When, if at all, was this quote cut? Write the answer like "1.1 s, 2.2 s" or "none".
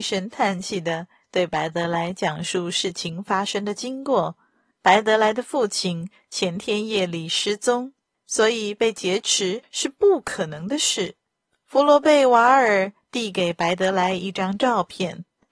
8.2 s